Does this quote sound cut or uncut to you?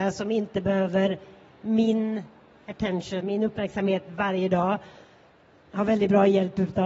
cut